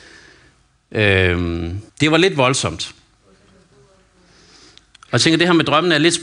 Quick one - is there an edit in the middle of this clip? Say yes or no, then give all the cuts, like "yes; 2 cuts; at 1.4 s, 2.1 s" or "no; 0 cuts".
yes; 1 cut; at 1.9 s